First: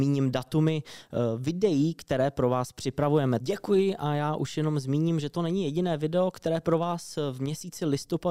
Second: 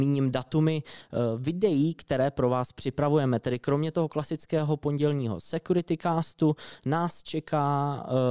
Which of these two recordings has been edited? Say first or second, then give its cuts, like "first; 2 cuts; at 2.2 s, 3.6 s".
first; 1 cut; at 3.4 s